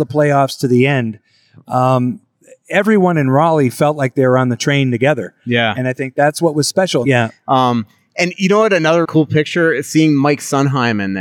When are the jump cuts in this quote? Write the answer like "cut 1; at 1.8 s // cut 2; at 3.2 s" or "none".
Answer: cut 1; at 7.0 s // cut 2; at 9.0 s